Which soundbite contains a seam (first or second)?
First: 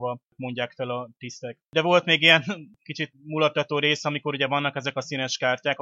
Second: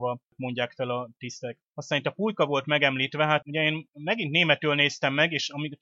first